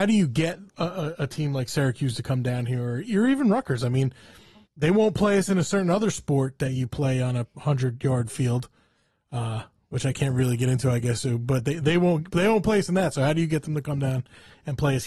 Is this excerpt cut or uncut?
cut